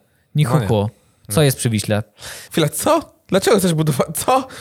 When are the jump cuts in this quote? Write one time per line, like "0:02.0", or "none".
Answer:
0:02.5